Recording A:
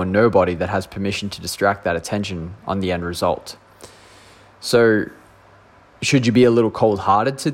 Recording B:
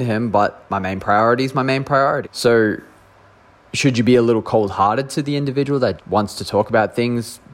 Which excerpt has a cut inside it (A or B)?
B